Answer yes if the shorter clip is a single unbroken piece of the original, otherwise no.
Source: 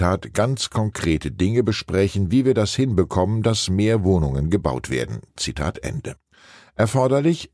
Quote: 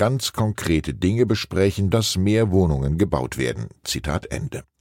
no